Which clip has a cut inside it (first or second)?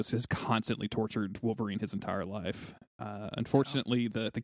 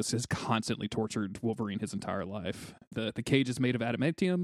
second